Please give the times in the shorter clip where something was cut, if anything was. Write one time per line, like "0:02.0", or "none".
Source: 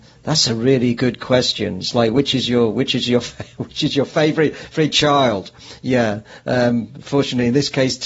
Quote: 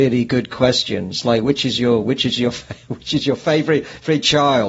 none